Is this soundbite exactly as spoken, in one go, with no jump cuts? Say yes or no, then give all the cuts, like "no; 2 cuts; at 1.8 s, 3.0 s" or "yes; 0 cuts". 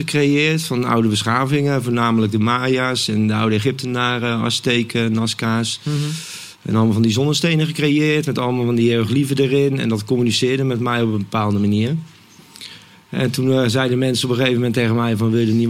yes; 0 cuts